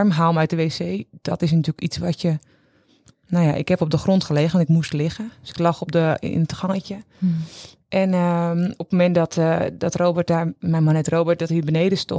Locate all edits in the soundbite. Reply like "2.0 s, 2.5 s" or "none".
none

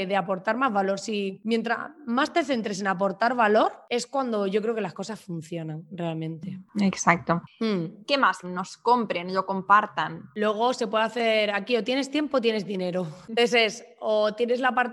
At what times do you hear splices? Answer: 8.4 s

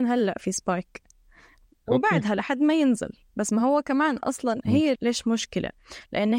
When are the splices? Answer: 5.0 s

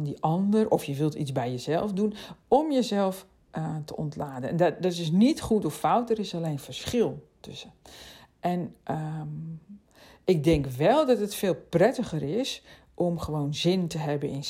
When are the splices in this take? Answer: none

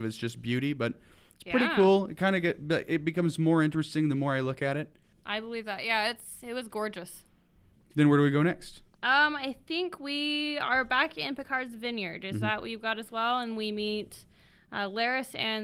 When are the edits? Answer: none

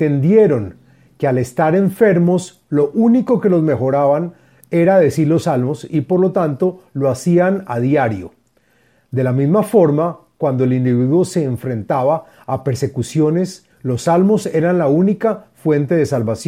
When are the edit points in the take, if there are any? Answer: 13.7 s

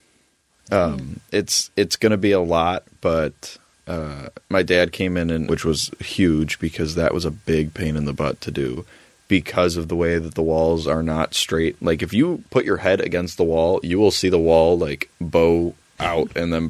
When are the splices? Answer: 4.4 s, 5.5 s

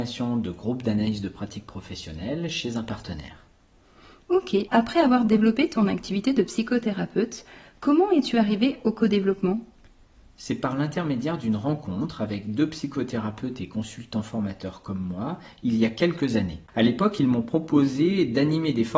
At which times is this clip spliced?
4.7 s

